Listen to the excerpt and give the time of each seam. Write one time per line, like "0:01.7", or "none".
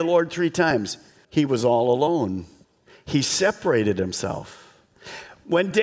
0:01.2